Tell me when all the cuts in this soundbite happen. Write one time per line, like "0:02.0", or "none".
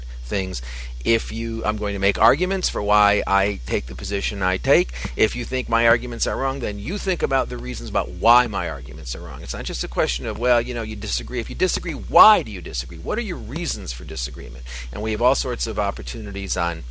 none